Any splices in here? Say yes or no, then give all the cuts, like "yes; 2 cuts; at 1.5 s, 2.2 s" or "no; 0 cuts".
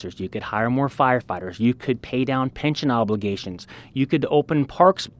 no; 0 cuts